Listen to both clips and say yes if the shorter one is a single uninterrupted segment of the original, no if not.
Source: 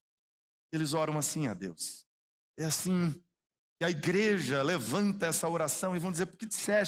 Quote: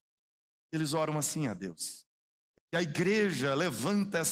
no